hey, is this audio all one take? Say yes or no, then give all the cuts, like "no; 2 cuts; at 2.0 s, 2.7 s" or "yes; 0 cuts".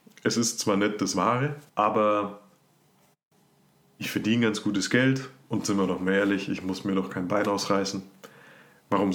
no; 1 cut; at 1.7 s